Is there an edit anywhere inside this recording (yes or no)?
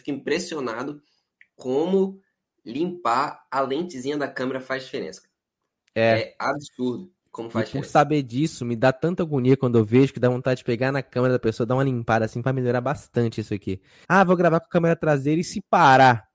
yes